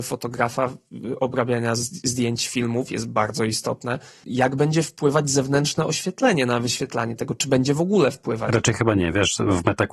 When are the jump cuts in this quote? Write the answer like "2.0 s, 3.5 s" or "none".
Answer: 4.2 s